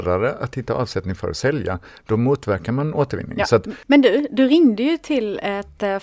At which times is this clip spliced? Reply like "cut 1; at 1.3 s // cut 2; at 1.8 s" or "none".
none

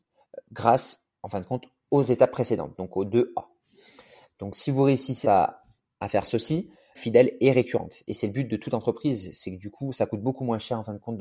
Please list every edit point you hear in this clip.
cut 1; at 5.2 s // cut 2; at 6.9 s

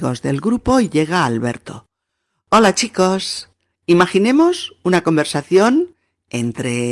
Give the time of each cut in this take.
cut 1; at 3.7 s

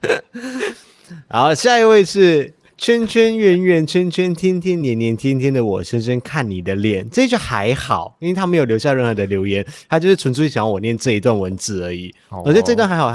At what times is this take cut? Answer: none

